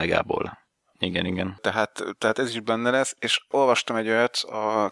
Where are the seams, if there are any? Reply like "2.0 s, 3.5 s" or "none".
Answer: 0.9 s